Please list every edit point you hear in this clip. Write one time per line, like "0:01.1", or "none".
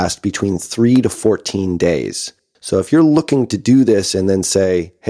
none